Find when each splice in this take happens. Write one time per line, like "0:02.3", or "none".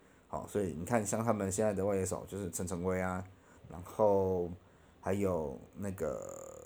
0:03.6